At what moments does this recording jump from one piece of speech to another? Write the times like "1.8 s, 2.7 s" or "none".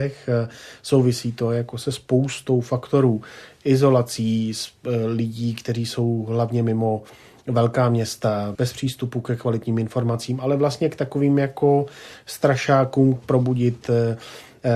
8.6 s, 13.2 s